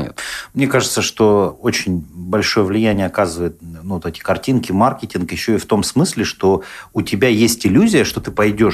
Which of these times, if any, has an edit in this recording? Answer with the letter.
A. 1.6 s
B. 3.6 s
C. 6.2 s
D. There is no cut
D